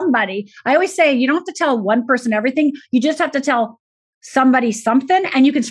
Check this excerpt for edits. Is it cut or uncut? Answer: uncut